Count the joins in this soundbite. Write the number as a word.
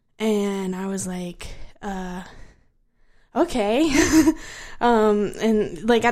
zero